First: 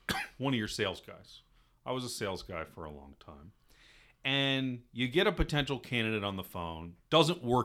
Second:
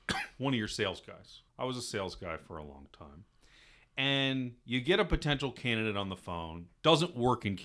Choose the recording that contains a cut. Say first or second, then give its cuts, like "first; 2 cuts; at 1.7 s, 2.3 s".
second; 1 cut; at 1.5 s